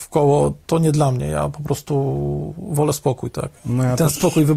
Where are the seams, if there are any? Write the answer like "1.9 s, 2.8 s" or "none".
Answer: none